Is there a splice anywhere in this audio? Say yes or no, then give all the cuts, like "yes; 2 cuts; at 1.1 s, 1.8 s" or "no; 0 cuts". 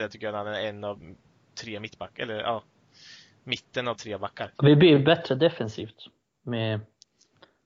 yes; 1 cut; at 4.6 s